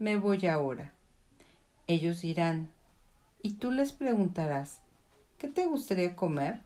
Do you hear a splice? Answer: yes; 1 cut; at 3.3 s

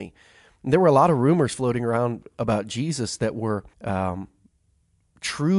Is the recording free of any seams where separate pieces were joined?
no; 1 cut; at 3.7 s

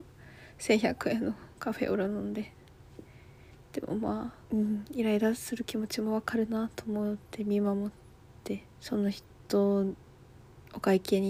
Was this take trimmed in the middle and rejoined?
yes; 2 cuts; at 4.4 s, 8.7 s

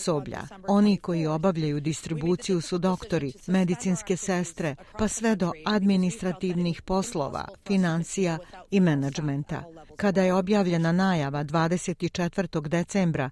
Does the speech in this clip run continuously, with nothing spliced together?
yes; 0 cuts

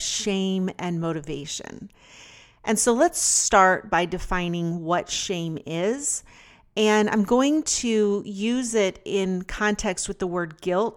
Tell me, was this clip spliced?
no; 0 cuts

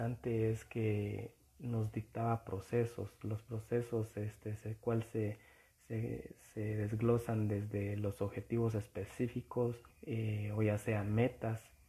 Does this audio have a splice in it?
yes; 1 cut; at 9.9 s

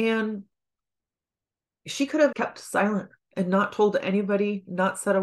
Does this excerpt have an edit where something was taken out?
yes; 1 cut; at 2.3 s

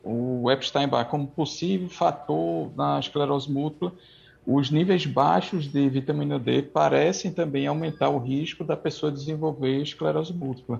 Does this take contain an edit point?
no; 0 cuts

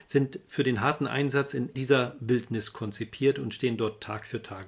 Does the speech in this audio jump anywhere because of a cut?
yes; 1 cut; at 1.7 s

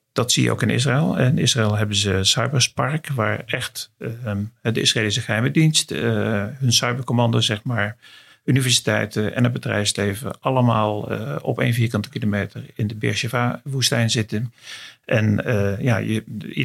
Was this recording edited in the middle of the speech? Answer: no; 0 cuts

